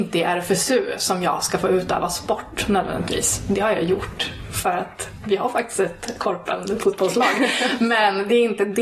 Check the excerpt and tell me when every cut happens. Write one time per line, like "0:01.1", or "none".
none